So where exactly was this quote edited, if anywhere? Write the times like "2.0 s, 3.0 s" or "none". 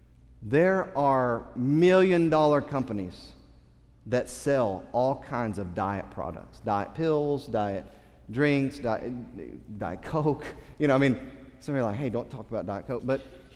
none